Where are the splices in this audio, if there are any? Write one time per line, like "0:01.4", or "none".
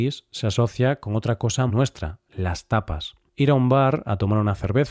0:01.7